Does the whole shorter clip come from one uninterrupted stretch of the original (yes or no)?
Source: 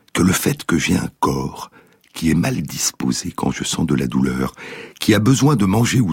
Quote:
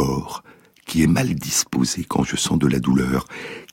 yes